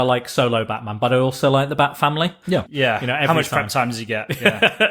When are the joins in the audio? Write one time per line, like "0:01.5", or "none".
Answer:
0:02.7